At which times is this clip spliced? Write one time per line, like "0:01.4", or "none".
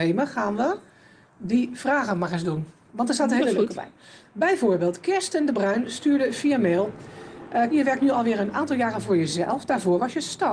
0:07.7